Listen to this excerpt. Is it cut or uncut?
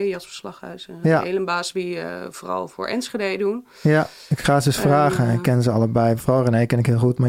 uncut